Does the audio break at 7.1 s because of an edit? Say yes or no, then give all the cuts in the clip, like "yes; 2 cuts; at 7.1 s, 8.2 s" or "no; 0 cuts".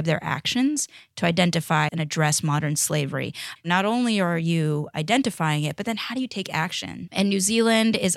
yes; 3 cuts; at 1.9 s, 3.6 s, 7.1 s